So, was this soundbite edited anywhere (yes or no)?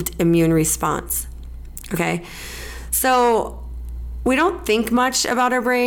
no